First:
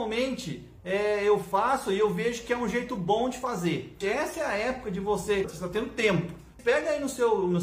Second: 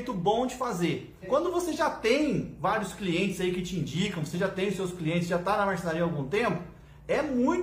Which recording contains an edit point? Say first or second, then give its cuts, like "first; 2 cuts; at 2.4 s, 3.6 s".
first; 3 cuts; at 4.0 s, 5.4 s, 6.6 s